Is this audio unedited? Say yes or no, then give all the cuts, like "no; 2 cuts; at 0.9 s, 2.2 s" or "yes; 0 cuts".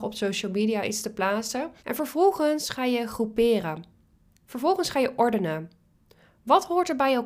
no; 1 cut; at 1.8 s